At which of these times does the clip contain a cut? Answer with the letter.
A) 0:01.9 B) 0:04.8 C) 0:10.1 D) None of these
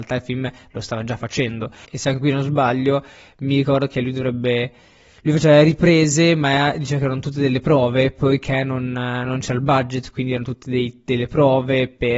A